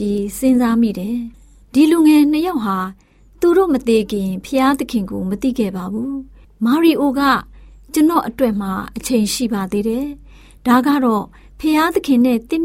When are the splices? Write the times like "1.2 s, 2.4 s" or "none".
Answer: none